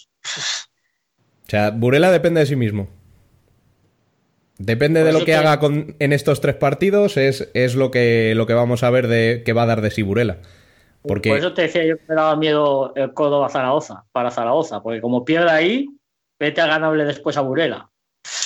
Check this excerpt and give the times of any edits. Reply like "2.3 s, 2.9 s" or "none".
none